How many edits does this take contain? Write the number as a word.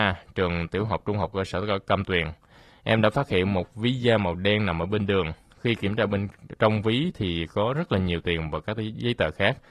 zero